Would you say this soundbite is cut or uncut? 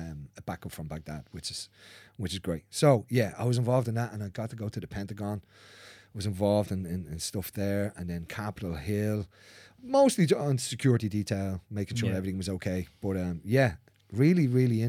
uncut